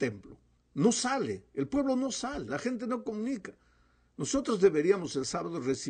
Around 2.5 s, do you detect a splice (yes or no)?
yes